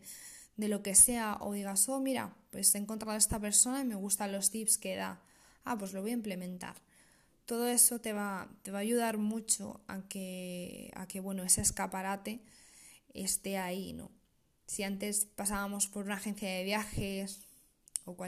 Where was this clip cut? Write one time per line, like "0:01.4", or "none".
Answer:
none